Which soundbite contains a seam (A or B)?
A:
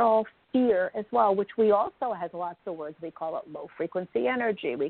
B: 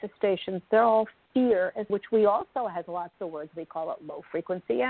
B